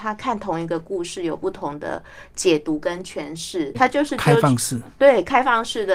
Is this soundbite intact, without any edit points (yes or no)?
no